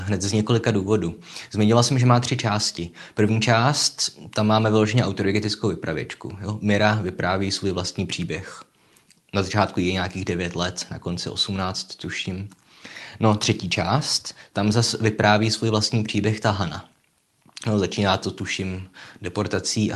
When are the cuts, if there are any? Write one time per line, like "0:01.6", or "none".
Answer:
none